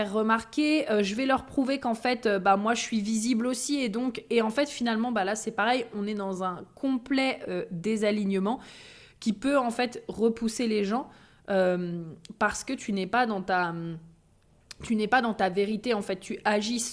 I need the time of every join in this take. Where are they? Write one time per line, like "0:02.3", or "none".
none